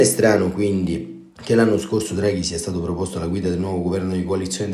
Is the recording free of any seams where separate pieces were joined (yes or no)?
yes